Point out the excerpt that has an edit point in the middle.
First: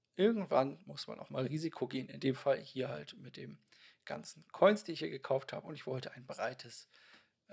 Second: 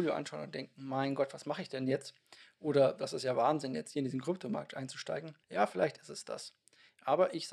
second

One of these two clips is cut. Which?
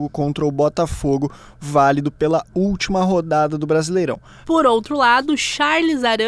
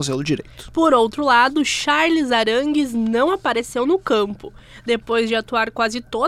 first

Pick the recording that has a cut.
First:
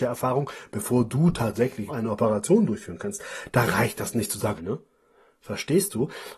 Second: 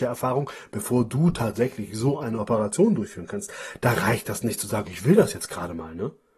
first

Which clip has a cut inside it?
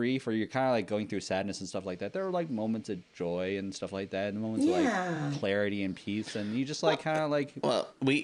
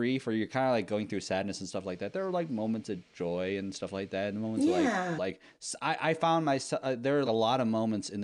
second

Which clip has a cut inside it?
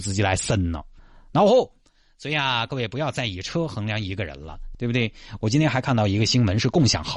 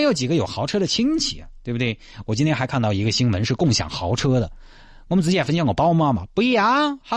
first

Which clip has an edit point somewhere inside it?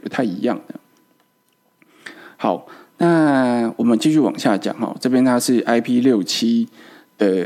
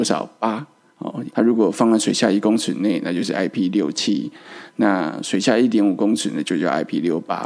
second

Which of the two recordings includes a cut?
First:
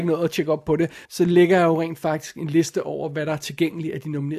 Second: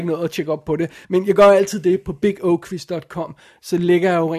first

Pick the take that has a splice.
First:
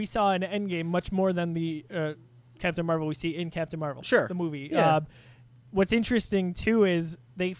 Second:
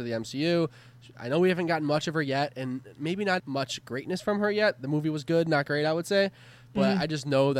second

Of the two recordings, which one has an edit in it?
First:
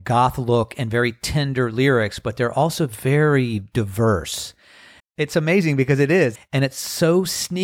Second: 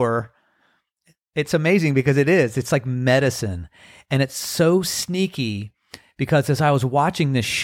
first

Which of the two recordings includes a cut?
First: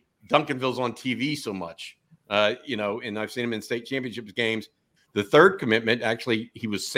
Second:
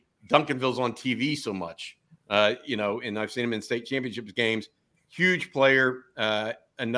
first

